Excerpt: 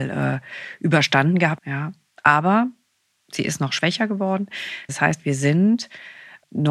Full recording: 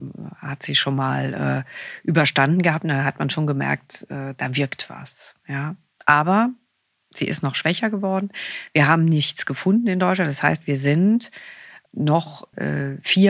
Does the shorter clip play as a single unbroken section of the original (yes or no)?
no